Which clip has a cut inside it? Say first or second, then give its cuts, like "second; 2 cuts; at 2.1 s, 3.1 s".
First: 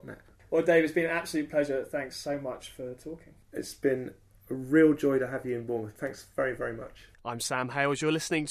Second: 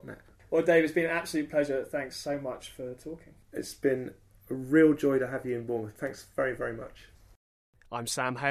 first; 1 cut; at 7.1 s